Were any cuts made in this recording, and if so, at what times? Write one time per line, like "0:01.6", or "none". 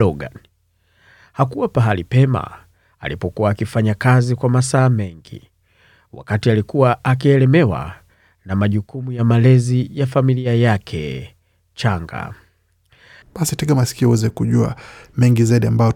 0:13.2